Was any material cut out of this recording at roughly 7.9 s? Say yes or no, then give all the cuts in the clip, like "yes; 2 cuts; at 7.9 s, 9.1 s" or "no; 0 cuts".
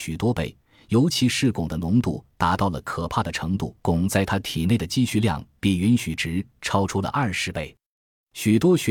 no; 1 cut; at 3.8 s